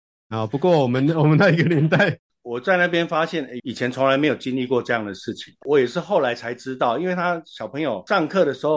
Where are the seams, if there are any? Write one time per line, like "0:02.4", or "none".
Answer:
0:02.3
0:03.6
0:05.6